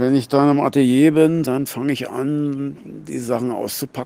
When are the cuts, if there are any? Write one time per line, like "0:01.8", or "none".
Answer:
0:01.4